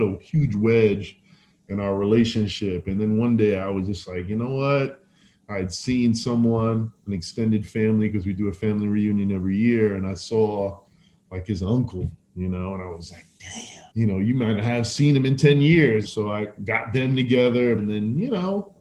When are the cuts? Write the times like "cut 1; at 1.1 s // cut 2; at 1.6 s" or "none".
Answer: cut 1; at 13.9 s // cut 2; at 16.0 s // cut 3; at 17.8 s